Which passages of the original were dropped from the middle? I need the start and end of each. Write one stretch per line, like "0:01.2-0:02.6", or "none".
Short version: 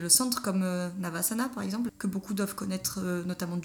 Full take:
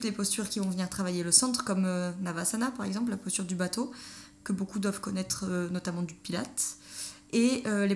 0:03.1-0:04.3